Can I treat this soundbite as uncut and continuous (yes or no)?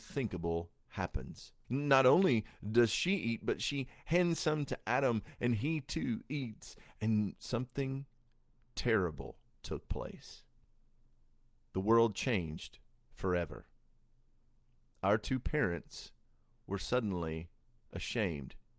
no